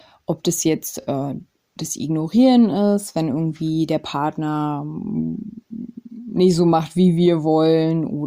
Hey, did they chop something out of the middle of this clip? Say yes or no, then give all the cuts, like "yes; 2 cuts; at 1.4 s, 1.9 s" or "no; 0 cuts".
no; 0 cuts